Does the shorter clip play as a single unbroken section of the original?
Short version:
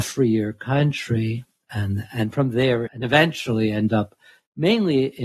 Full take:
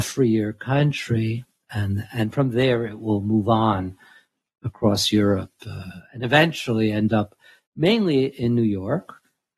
no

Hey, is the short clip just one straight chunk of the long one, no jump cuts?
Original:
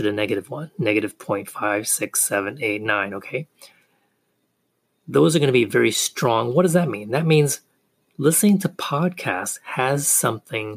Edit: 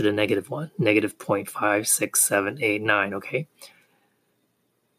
yes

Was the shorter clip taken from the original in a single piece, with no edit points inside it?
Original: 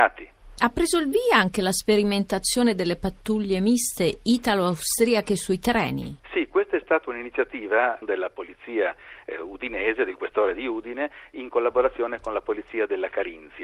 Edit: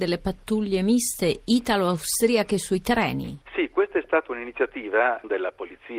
yes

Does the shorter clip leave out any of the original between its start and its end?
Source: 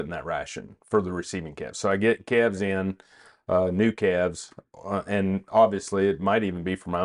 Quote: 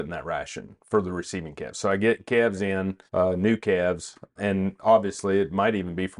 yes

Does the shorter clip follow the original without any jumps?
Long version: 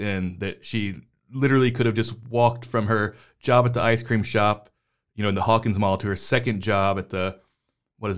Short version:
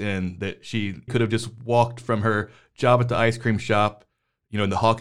no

